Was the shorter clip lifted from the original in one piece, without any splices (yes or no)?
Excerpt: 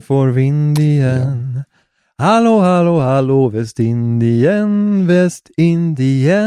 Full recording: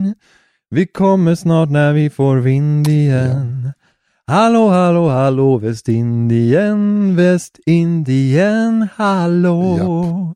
yes